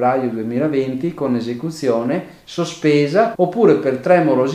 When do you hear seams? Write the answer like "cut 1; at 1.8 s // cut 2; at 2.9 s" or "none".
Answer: cut 1; at 3.3 s